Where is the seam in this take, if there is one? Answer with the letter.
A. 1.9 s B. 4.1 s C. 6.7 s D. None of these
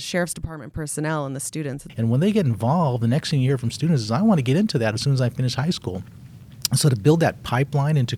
A